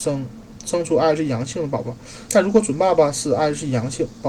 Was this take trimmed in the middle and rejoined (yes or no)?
yes